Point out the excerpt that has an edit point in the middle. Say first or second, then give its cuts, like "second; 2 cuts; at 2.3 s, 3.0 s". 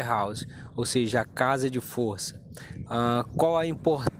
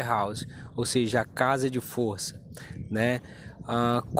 first; 1 cut; at 2.9 s